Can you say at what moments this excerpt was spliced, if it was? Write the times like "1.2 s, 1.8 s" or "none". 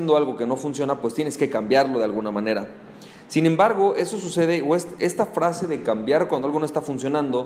none